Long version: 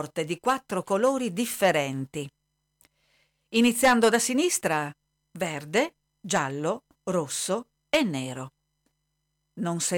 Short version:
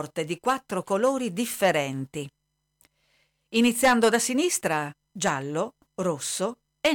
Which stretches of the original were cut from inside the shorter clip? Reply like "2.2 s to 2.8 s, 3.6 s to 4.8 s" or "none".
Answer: 5.1 s to 6.2 s